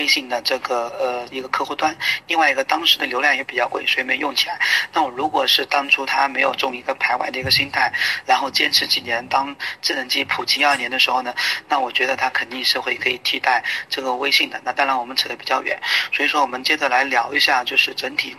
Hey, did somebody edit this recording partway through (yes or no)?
yes